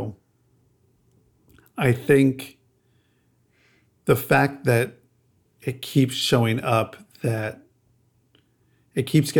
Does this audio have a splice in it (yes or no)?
no